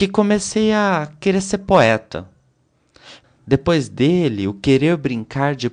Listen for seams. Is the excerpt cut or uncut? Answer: cut